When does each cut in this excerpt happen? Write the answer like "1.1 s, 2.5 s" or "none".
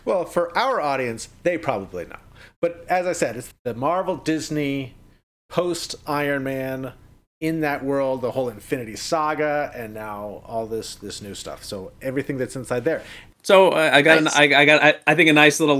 3.5 s, 13.3 s